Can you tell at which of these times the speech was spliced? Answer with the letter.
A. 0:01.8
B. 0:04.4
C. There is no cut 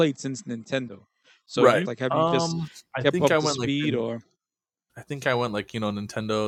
A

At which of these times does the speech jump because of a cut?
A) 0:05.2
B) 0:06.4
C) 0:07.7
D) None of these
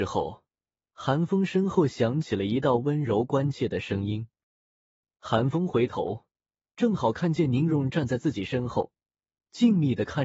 C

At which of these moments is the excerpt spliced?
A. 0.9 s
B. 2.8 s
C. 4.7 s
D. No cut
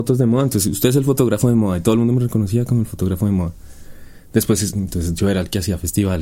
C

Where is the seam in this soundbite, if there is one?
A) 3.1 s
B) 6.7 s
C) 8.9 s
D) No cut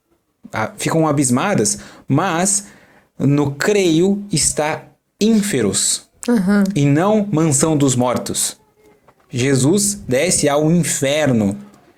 D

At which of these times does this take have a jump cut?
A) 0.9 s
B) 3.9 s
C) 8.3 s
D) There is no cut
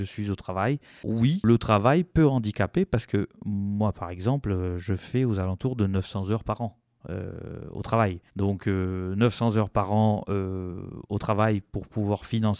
C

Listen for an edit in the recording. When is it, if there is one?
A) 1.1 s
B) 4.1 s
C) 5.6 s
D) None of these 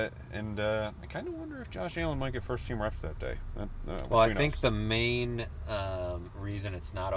B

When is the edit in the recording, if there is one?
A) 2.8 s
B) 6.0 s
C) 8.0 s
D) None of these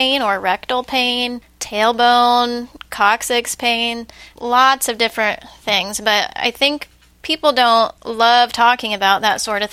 C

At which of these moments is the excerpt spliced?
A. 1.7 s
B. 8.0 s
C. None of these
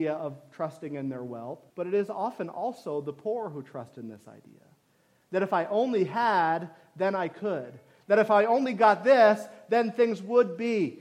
A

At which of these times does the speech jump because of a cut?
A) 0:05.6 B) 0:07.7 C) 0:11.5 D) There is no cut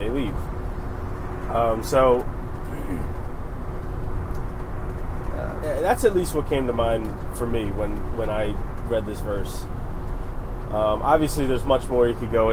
A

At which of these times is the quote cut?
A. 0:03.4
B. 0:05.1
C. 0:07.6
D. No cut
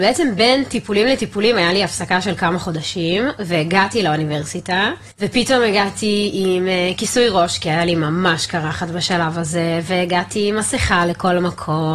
B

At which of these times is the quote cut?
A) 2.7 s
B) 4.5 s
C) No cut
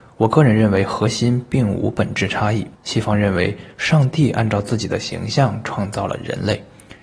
A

